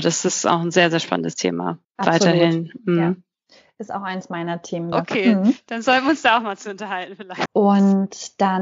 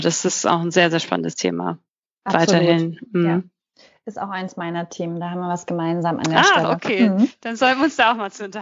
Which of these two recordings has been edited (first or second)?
first